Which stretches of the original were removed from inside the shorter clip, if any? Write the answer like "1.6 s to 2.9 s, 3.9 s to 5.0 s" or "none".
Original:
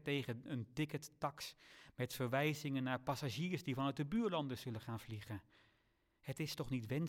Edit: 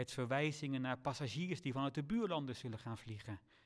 none